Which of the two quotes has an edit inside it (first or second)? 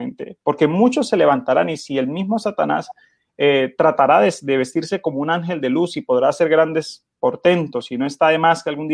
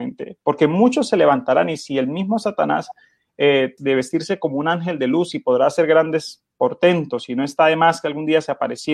second